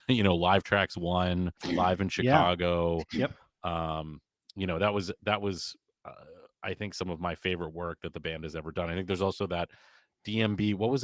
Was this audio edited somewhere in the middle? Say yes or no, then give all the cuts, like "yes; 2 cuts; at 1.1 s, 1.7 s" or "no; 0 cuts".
no; 0 cuts